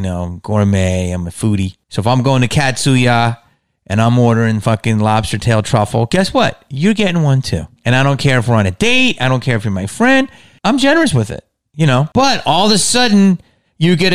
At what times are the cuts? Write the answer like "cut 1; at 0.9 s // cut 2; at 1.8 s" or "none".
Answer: cut 1; at 7.8 s // cut 2; at 12.1 s